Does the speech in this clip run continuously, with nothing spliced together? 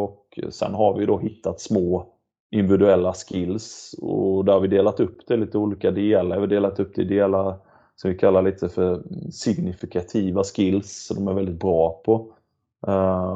yes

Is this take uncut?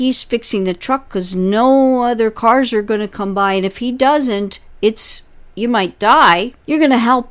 yes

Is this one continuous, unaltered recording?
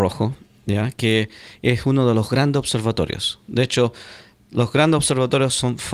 yes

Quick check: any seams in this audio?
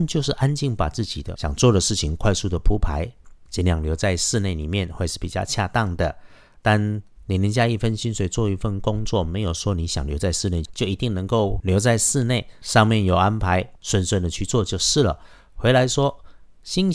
no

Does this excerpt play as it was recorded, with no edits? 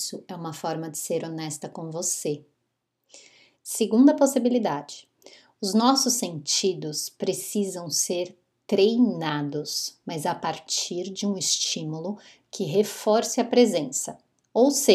no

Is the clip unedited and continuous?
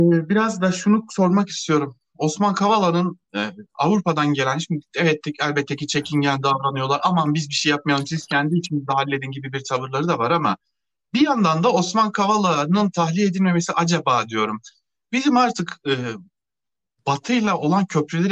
yes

